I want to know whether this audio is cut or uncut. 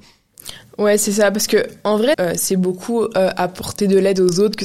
cut